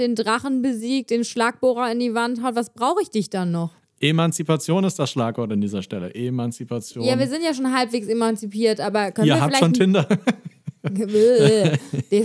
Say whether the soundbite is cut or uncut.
uncut